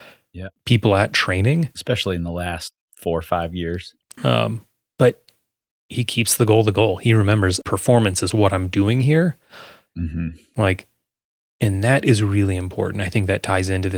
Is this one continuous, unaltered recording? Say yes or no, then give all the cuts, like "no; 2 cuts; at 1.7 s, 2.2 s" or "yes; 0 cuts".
no; 3 cuts; at 4.2 s, 7.6 s, 9.9 s